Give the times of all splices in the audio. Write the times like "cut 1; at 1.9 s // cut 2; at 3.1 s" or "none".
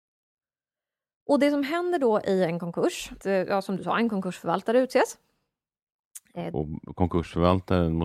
cut 1; at 3.2 s // cut 2; at 6.5 s